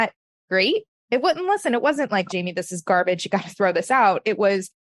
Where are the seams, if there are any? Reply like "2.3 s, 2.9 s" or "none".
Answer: 2.3 s